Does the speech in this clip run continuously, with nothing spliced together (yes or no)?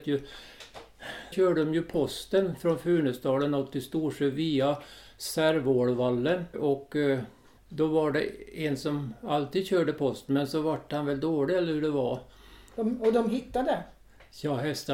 no